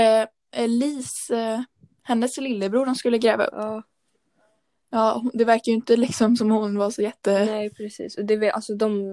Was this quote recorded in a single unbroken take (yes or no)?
yes